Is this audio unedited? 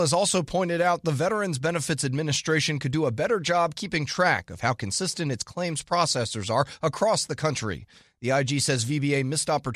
yes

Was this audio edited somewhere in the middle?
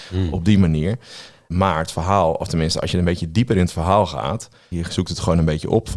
yes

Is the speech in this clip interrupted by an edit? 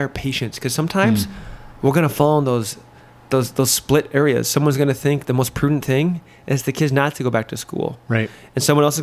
no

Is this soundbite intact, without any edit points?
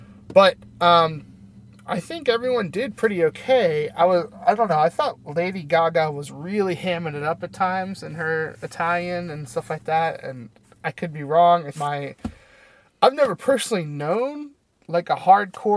no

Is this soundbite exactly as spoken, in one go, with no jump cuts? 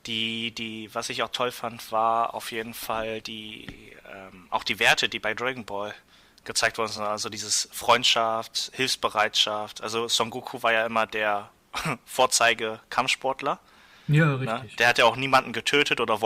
yes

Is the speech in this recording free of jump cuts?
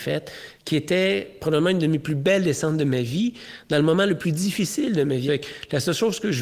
no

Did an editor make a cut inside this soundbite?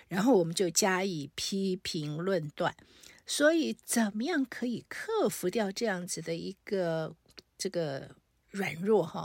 no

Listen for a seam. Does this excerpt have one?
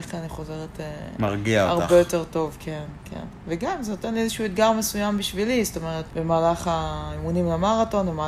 yes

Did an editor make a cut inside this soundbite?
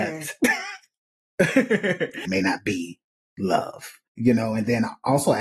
yes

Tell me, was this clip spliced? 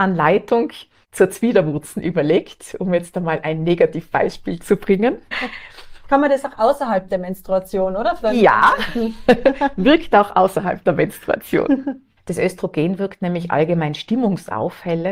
yes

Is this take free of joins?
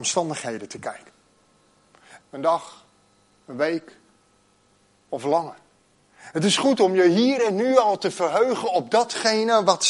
no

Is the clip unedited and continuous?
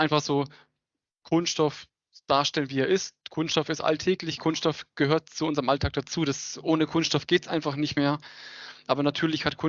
yes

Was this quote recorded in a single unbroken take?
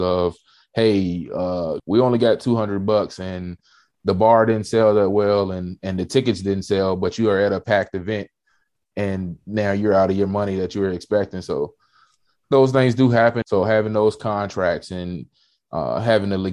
no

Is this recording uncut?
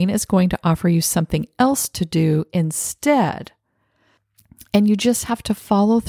yes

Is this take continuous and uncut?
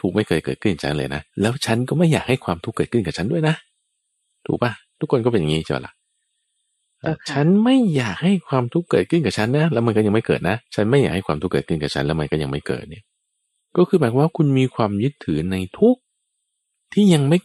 no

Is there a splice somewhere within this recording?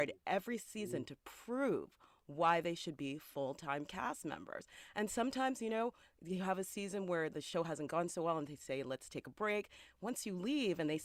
no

